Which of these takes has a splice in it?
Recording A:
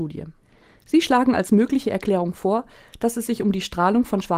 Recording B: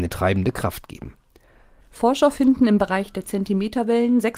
B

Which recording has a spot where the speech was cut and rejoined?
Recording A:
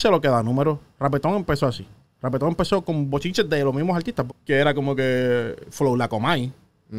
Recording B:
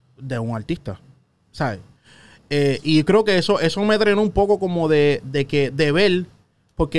A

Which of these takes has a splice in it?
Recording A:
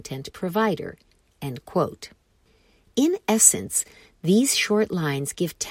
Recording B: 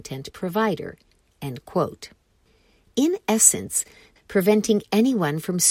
B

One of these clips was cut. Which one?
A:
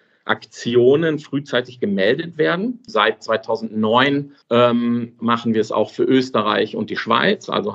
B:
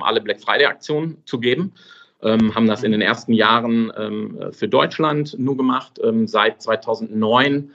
A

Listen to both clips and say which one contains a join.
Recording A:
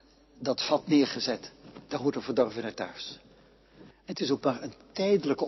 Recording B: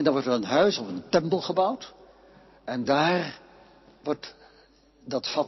A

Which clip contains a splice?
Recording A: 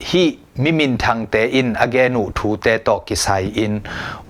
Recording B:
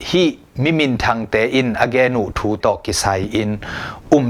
B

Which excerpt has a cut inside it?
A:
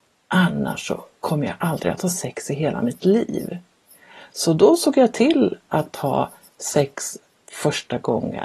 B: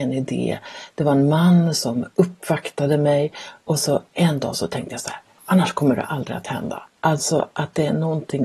B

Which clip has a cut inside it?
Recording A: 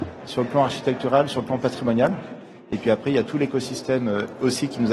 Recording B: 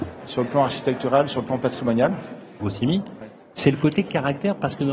B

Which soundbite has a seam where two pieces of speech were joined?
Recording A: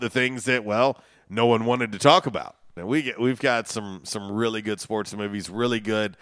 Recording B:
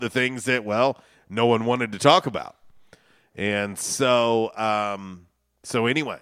A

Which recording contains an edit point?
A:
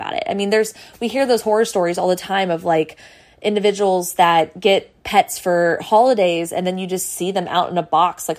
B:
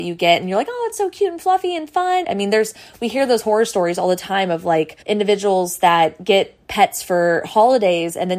B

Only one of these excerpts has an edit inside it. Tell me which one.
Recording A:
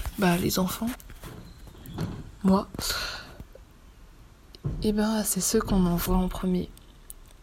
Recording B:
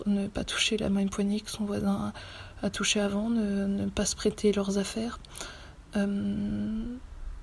A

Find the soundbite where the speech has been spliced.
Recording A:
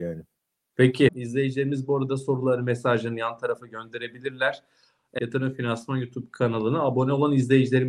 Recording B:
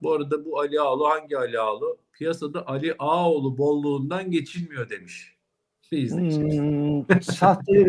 A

